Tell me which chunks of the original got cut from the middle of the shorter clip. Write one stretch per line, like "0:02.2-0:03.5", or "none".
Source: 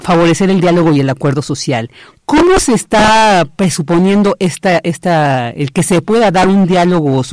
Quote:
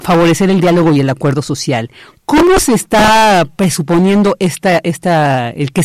none